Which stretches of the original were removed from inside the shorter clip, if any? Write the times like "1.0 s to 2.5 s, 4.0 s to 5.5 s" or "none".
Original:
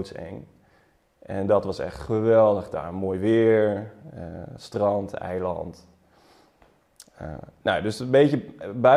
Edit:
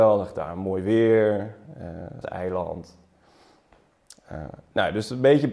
4.6 s to 5.1 s